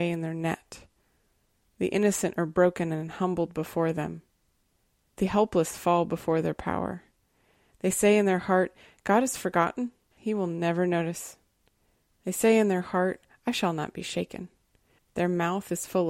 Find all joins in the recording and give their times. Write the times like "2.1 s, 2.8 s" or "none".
10.2 s, 12.1 s, 15.0 s